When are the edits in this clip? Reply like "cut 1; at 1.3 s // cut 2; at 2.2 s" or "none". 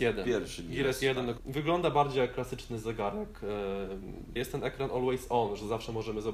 cut 1; at 1.4 s // cut 2; at 4.4 s